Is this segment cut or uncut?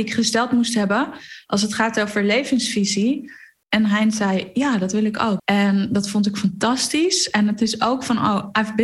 cut